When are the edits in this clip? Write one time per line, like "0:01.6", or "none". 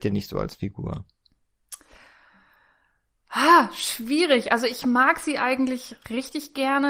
none